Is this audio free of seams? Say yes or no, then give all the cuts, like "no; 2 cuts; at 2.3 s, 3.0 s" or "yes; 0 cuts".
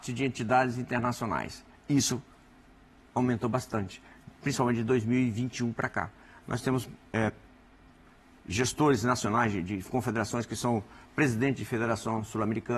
yes; 0 cuts